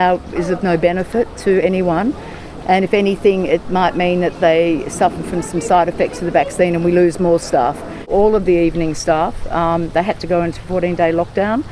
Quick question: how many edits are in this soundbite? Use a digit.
0